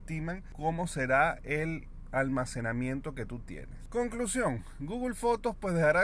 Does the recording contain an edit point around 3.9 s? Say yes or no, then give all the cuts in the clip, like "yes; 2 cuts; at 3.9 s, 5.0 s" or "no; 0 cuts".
no; 0 cuts